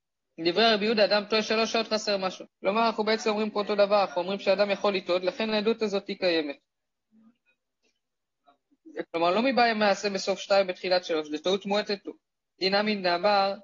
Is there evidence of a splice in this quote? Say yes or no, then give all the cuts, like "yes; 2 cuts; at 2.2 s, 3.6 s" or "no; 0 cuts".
yes; 2 cuts; at 2.5 s, 9.0 s